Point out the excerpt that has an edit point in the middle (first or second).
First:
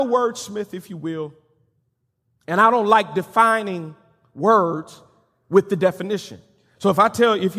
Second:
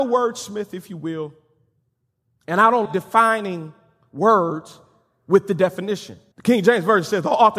second